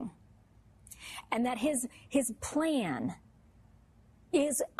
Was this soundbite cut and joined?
no; 0 cuts

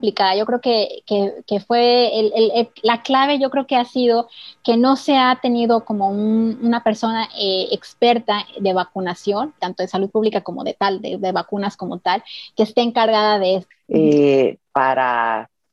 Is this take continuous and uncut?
no; 2 cuts; at 9.6 s, 13.7 s

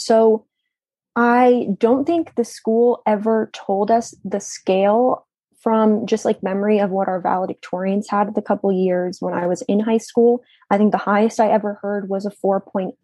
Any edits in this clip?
no; 0 cuts

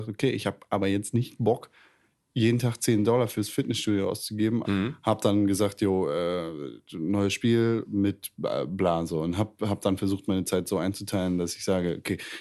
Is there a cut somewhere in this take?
yes; 1 cut; at 4.6 s

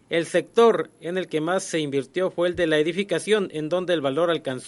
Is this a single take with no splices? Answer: yes; 0 cuts

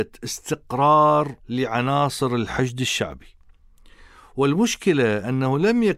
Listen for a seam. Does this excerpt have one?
yes; 1 cut; at 1.4 s

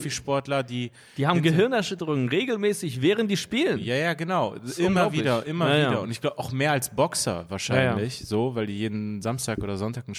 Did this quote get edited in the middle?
no; 0 cuts

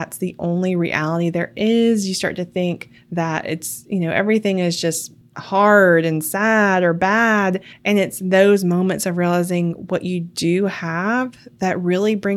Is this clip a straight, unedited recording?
yes; 0 cuts

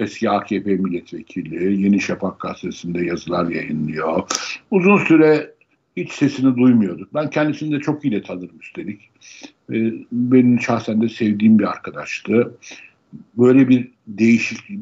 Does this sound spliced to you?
no; 0 cuts

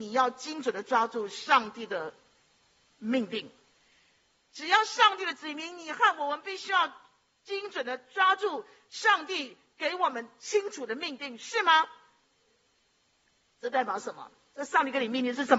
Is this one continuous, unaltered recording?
yes; 0 cuts

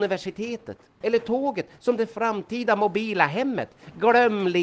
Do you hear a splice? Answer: yes; 1 cut; at 1.0 s

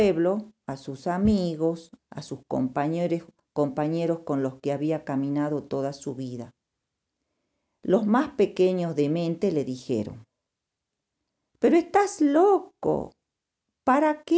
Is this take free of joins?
no; 1 cut; at 2.0 s

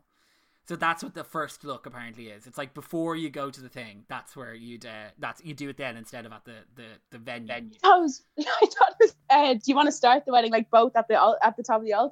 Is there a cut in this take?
no; 0 cuts

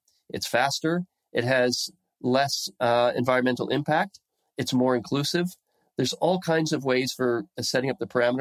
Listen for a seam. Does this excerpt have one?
no; 0 cuts

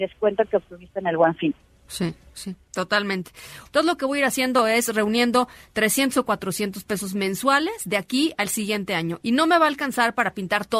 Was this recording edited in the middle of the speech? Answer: yes; 2 cuts; at 3.6 s, 9.2 s

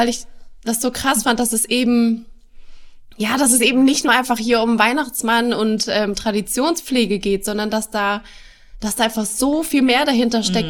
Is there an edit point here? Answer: no; 0 cuts

